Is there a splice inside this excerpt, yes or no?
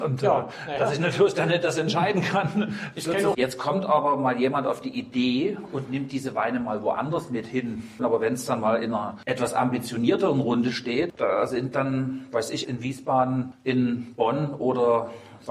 yes